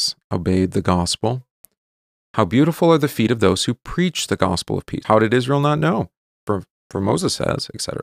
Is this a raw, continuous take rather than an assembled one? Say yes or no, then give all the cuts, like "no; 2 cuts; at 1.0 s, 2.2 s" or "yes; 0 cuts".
no; 2 cuts; at 2.1 s, 5.0 s